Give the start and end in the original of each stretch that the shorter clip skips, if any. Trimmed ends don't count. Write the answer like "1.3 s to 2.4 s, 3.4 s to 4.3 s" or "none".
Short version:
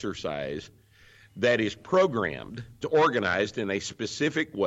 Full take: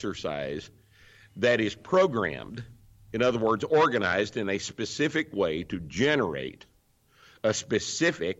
2.8 s to 3.6 s